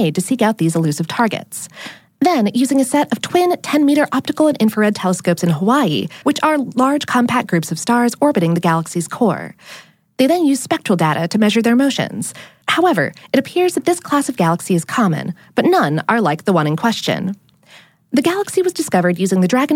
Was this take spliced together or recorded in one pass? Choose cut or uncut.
cut